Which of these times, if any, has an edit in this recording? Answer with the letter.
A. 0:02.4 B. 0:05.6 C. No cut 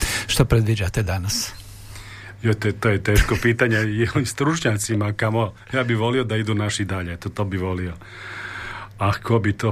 C